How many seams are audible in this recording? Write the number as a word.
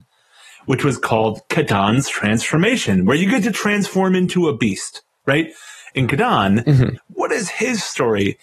two